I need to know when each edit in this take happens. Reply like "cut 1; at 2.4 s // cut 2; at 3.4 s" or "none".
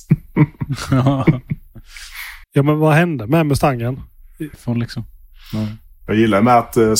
cut 1; at 2.4 s // cut 2; at 4.5 s

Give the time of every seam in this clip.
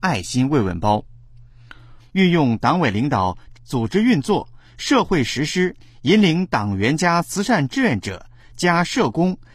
cut 1; at 2.0 s // cut 2; at 3.5 s // cut 3; at 5.8 s

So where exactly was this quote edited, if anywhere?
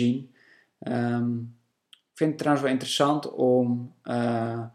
none

